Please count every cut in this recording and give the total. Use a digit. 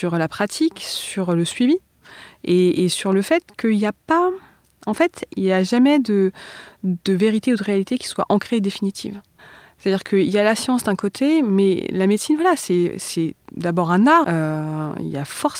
1